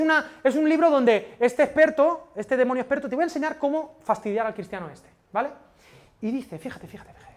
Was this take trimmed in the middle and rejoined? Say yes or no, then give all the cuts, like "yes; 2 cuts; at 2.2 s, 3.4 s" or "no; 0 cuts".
no; 0 cuts